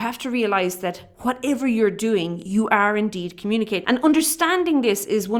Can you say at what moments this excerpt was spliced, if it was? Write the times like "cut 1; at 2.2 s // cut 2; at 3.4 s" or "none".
cut 1; at 3.8 s